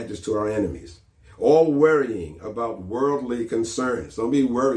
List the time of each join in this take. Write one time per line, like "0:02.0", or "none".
none